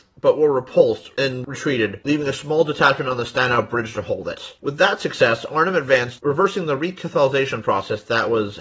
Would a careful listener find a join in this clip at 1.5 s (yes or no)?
no